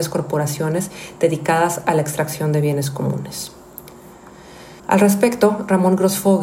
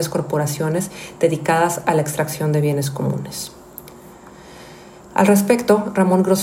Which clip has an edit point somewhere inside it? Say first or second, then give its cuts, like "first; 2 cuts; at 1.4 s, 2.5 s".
first; 1 cut; at 4.8 s